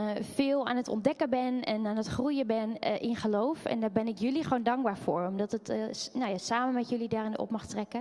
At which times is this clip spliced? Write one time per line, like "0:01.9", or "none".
none